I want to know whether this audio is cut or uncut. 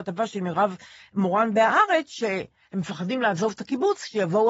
uncut